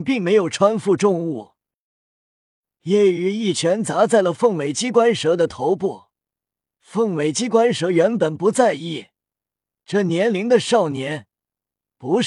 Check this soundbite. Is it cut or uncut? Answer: uncut